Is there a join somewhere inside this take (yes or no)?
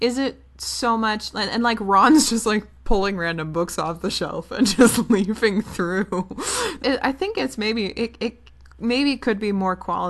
yes